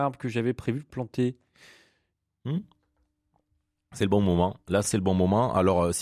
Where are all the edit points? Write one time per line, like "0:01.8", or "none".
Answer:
0:04.8